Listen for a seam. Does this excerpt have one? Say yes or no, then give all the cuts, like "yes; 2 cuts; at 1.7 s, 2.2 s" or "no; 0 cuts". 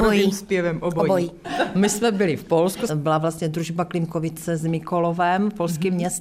yes; 2 cuts; at 1.4 s, 2.9 s